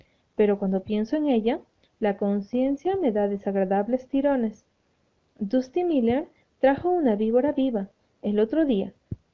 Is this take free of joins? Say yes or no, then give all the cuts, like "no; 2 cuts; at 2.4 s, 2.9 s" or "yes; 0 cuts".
no; 1 cut; at 1.8 s